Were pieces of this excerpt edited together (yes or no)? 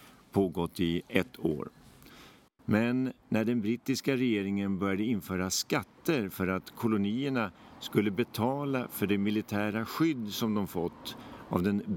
yes